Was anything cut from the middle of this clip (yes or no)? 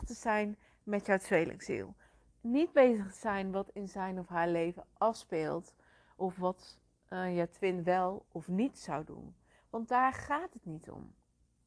no